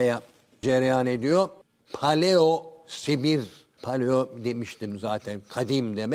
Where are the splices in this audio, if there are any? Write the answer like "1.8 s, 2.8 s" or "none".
1.8 s